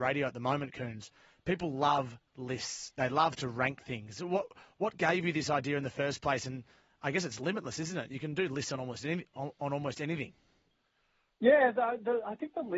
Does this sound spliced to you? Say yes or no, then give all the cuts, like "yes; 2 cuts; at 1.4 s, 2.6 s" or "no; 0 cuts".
no; 0 cuts